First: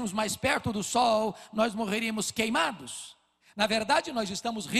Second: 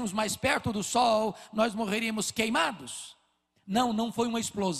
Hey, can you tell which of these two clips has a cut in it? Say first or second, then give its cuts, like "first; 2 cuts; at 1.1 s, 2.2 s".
first; 1 cut; at 3.4 s